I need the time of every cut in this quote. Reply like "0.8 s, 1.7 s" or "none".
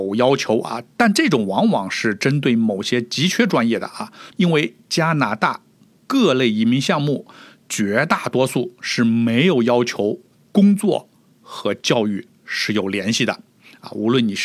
4.3 s